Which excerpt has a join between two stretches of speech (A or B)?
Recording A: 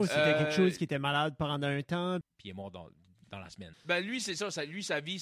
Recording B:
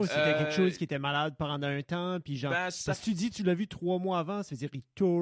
A